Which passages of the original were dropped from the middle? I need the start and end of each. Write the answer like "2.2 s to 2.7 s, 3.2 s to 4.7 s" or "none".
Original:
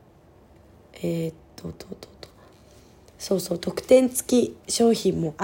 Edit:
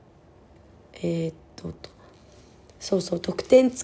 1.8 s to 2.2 s